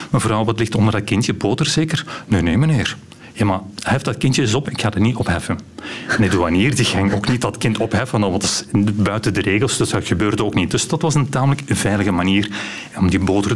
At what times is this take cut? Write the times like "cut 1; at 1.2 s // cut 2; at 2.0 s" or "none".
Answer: cut 1; at 4.6 s